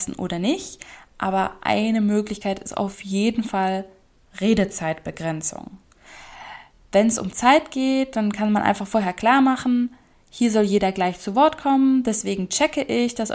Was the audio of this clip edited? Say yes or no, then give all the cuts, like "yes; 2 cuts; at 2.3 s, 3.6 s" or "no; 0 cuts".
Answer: no; 0 cuts